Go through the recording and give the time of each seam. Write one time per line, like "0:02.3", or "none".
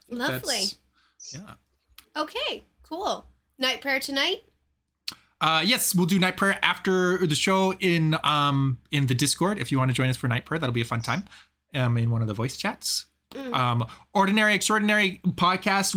none